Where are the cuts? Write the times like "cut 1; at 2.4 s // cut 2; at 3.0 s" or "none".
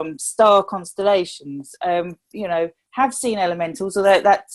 none